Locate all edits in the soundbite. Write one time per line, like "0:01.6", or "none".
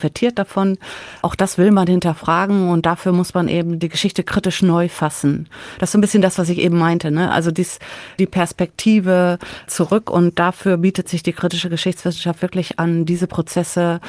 none